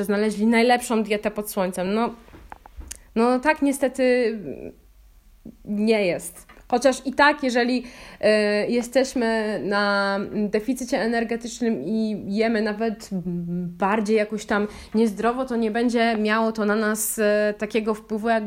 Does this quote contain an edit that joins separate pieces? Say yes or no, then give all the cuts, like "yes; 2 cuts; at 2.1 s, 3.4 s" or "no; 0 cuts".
no; 0 cuts